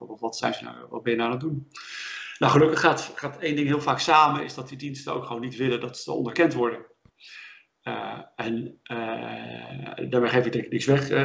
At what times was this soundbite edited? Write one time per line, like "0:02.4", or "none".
none